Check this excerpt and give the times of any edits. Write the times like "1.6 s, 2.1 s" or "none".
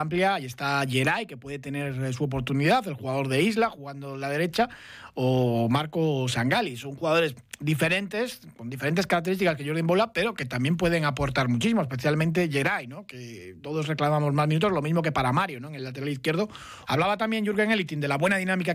16.9 s